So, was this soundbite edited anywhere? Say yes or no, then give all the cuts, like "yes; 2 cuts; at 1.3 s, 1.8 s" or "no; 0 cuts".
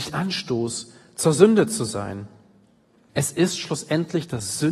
yes; 1 cut; at 3.1 s